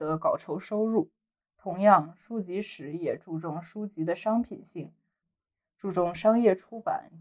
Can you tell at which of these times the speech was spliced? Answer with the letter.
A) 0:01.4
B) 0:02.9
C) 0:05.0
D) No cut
A